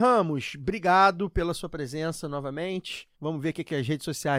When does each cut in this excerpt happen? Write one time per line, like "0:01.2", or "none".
0:03.1